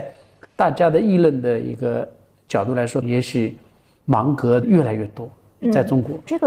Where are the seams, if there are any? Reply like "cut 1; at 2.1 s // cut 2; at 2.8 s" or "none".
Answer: cut 1; at 3.0 s